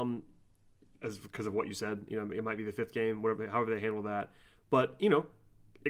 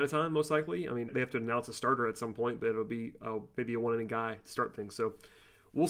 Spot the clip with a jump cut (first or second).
second